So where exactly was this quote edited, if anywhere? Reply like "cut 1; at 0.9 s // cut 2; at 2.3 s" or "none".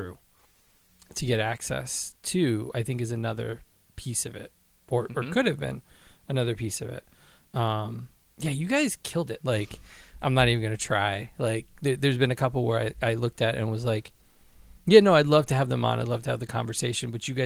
cut 1; at 9.4 s